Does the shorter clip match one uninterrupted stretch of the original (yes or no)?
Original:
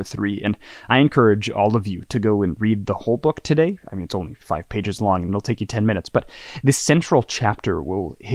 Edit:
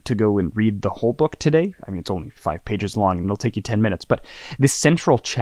yes